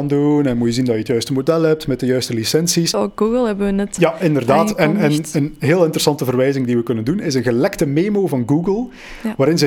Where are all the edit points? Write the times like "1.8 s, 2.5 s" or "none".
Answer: 2.9 s, 4.0 s